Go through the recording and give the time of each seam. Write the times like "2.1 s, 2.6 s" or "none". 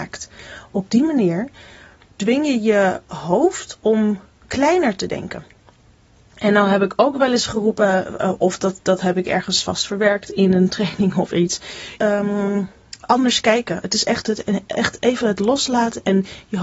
12.0 s